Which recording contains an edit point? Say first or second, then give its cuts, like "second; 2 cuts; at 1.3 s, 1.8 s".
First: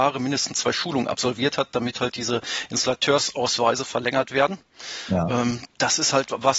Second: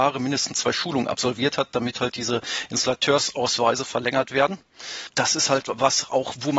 second; 1 cut; at 5.1 s